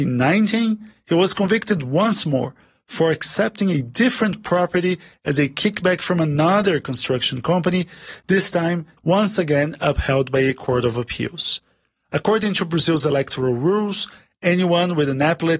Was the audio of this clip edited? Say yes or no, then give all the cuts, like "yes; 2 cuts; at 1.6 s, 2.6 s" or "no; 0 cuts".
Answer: yes; 1 cut; at 9.0 s